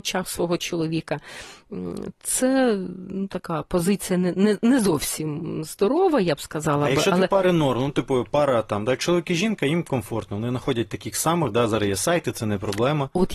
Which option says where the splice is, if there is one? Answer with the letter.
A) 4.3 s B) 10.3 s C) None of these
C